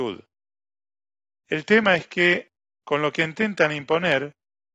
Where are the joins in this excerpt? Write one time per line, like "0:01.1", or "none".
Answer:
none